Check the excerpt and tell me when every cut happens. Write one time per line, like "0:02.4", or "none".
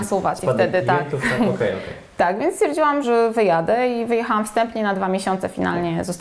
0:03.0

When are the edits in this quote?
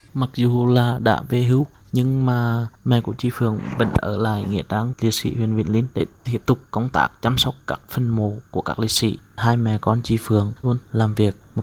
0:10.6

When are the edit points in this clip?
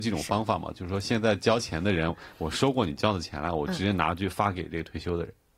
none

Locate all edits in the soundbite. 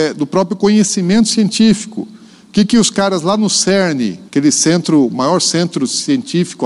0:04.3

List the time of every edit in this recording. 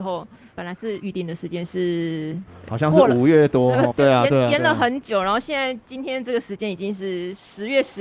0:03.9

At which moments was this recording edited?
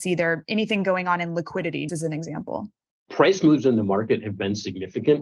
0:01.9

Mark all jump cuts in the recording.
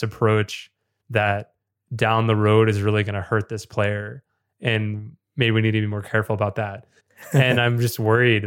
0:07.0

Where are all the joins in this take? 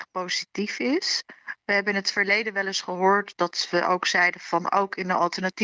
none

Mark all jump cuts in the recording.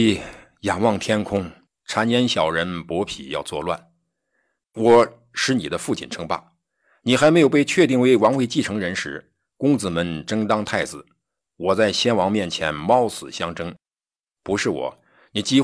0:01.7
0:04.6

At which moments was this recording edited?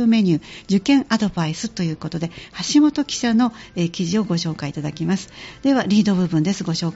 none

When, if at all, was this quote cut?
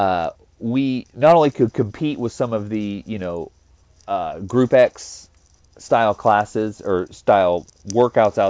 none

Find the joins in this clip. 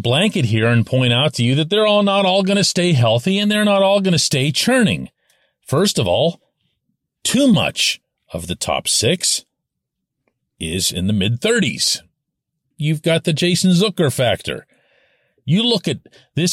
0:12.7

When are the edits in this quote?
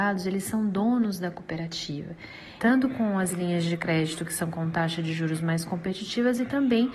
0:02.6

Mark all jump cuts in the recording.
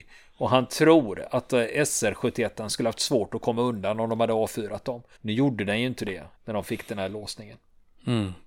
0:05.2
0:06.3

